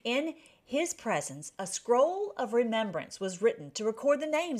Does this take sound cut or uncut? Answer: uncut